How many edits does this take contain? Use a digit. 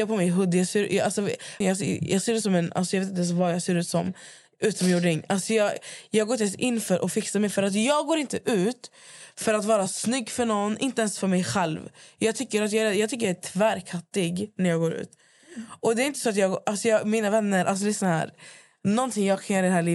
1